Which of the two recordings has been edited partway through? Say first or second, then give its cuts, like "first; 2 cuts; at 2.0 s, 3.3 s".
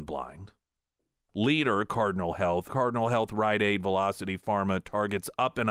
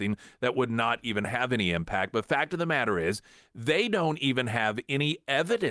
first; 2 cuts; at 1.3 s, 2.7 s